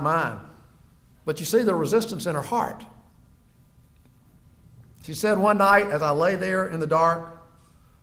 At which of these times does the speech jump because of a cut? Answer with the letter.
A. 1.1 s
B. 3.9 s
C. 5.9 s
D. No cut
A